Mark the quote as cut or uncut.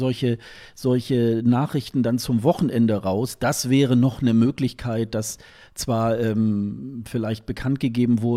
uncut